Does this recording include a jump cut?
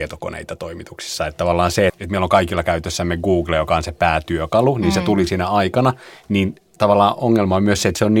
yes; 1 cut; at 1.9 s

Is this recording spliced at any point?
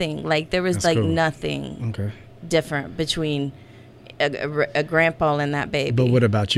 no; 0 cuts

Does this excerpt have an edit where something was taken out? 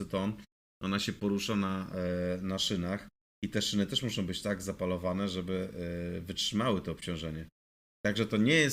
no; 0 cuts

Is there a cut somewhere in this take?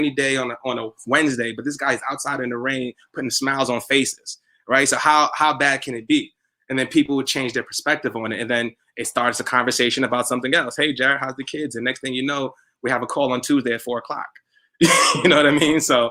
no; 0 cuts

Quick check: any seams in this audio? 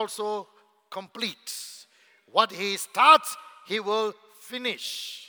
no; 0 cuts

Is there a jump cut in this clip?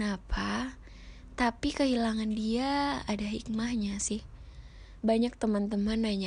yes; 1 cut; at 5.0 s

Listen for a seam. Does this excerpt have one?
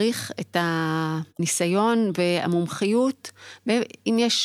yes; 1 cut; at 1.3 s

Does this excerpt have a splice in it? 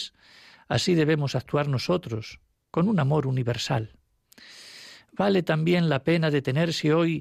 no; 0 cuts

